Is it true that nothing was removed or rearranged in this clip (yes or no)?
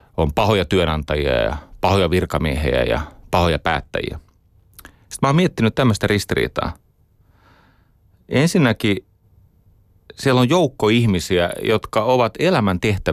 yes